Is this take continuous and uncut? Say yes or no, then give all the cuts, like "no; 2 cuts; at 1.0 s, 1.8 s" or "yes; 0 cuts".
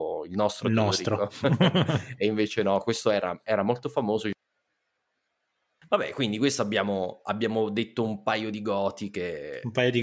yes; 0 cuts